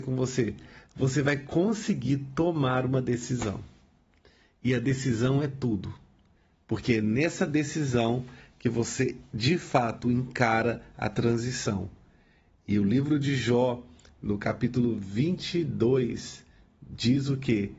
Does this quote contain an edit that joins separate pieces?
no; 0 cuts

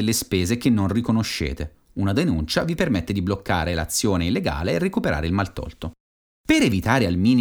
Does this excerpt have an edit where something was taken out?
no; 0 cuts

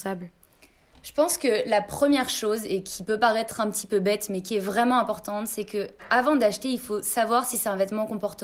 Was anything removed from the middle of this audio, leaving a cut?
no; 0 cuts

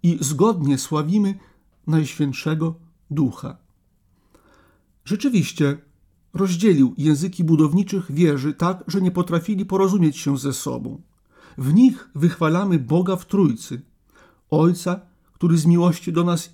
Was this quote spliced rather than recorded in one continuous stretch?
yes; 2 cuts; at 6.2 s, 11.4 s

